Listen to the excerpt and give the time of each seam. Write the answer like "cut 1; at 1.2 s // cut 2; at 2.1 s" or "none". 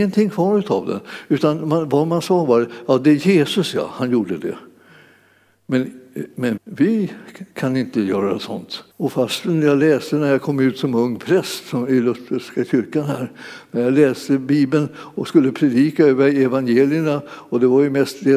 cut 1; at 6.6 s // cut 2; at 8.9 s